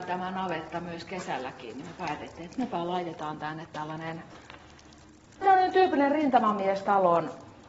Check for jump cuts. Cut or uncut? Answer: uncut